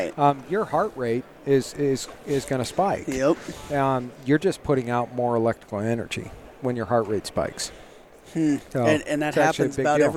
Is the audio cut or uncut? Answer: uncut